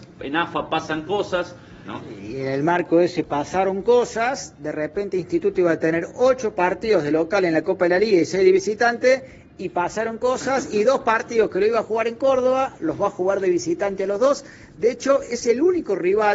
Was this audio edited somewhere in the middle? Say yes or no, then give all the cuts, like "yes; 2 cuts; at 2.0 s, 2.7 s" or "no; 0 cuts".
yes; 1 cut; at 1.8 s